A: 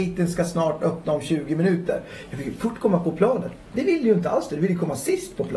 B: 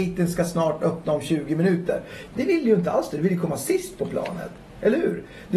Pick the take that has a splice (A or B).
B